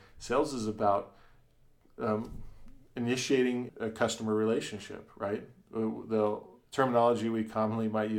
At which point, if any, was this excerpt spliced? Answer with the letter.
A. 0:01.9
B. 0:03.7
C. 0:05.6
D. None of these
B